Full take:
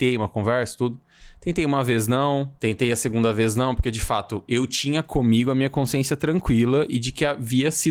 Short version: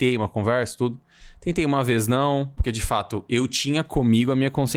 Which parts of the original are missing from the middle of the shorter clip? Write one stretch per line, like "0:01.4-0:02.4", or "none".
0:02.6-0:03.8